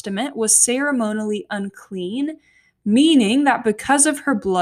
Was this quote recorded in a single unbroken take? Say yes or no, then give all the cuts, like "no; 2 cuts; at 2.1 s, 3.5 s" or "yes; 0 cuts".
yes; 0 cuts